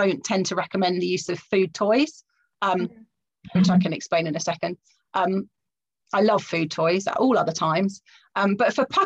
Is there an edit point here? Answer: no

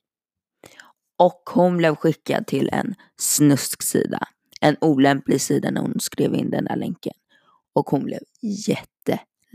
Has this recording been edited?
no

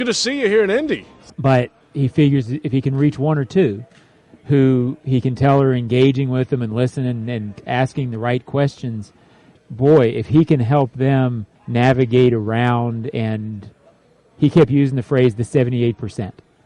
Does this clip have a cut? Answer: yes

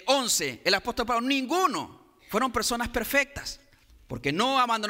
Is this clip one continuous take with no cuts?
no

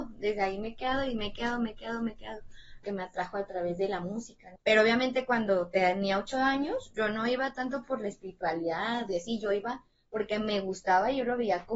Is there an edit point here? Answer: yes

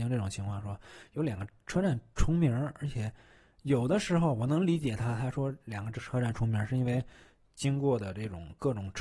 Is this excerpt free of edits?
yes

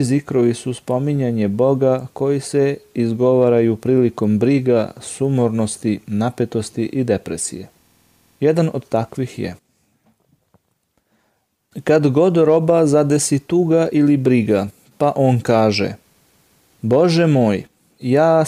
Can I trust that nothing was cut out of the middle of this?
yes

